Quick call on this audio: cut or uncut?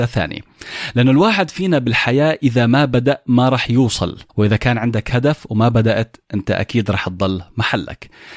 cut